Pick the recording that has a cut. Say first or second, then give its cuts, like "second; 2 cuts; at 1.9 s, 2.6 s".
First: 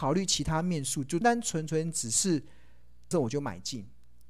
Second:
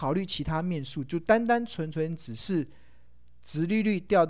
first; 2 cuts; at 1.2 s, 3.1 s